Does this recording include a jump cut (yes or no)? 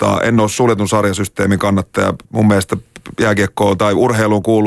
yes